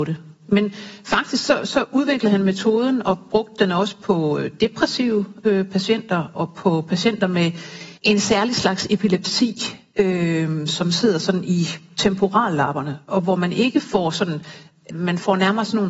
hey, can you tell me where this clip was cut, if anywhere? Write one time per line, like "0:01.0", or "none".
0:06.3
0:08.0
0:14.9